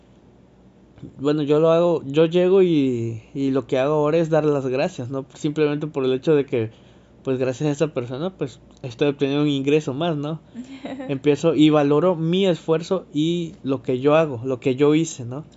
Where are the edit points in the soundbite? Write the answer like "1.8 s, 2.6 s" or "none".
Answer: none